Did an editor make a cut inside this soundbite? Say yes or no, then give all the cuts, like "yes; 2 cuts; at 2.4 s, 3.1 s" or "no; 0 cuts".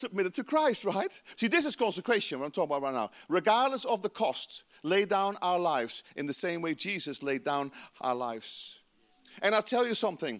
yes; 1 cut; at 1.3 s